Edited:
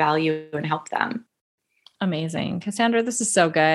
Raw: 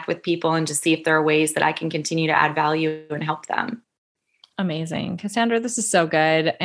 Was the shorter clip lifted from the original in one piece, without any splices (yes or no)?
yes